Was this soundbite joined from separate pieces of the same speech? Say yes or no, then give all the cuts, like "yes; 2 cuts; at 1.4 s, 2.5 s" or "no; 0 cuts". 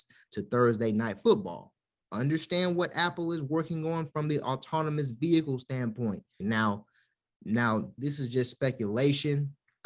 yes; 3 cuts; at 2.0 s, 6.4 s, 8.0 s